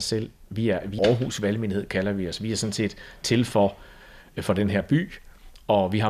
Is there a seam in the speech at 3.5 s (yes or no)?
no